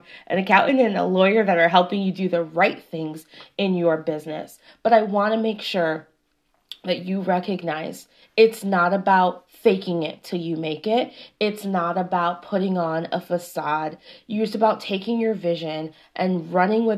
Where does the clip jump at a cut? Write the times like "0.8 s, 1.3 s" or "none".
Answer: none